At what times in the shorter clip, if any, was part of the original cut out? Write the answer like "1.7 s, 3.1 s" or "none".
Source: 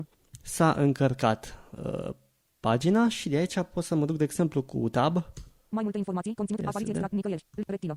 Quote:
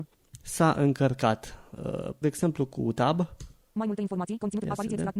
2.2 s